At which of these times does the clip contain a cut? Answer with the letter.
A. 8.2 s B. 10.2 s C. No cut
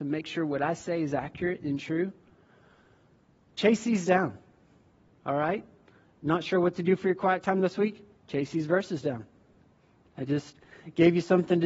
C